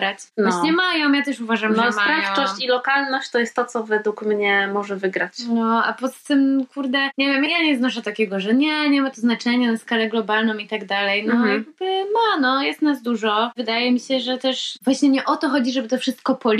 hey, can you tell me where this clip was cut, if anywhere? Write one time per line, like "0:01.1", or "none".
0:07.5